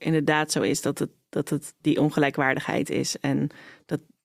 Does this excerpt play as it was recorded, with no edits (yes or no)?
yes